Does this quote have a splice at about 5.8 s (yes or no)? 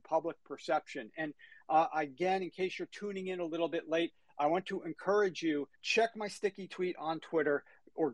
yes